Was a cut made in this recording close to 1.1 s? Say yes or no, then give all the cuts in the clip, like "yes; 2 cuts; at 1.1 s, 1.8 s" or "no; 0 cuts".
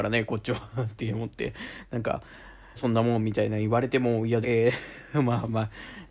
no; 2 cuts; at 2.8 s, 4.4 s